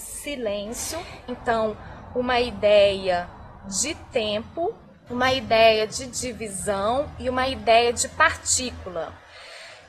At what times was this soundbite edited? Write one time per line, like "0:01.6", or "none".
0:01.3
0:05.1